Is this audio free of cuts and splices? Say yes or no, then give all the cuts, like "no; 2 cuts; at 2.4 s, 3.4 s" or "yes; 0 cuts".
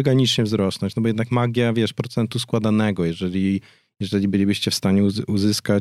yes; 0 cuts